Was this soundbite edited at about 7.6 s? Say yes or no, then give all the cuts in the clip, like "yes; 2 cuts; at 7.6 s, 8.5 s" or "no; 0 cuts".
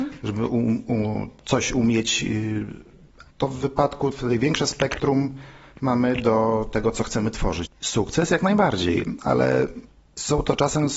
yes; 2 cuts; at 3.3 s, 7.6 s